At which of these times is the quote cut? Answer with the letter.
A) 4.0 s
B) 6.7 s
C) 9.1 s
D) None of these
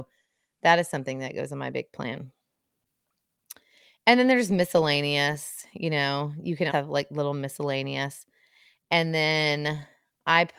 B